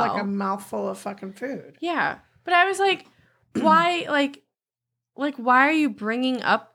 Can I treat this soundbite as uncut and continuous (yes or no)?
yes